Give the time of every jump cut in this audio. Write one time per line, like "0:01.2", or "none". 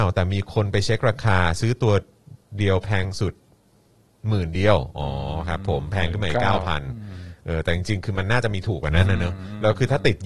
none